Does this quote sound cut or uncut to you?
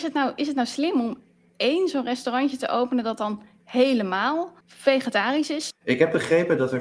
cut